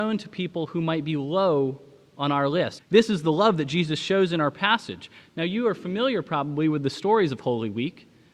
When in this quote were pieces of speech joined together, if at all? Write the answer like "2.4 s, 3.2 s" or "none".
2.8 s